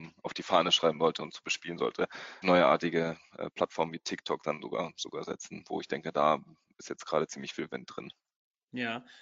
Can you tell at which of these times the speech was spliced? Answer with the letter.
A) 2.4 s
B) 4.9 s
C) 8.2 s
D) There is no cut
A